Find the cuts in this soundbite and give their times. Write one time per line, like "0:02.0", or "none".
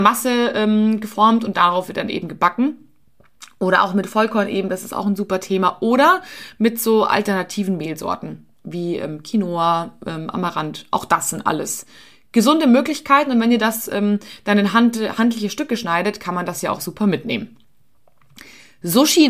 none